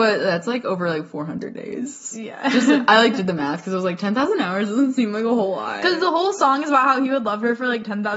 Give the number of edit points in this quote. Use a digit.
0